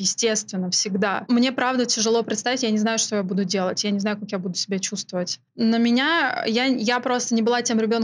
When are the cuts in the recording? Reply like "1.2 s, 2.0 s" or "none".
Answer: none